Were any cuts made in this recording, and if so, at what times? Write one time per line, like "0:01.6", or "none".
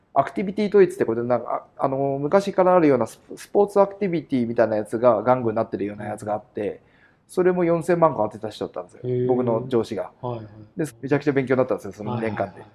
0:10.9